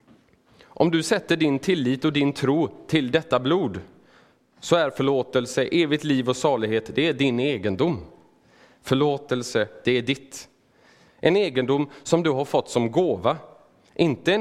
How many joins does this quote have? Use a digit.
1